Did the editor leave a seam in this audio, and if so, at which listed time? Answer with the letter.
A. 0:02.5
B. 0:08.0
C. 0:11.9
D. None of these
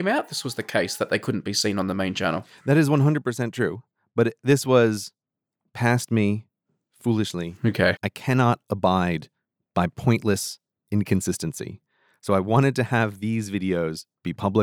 B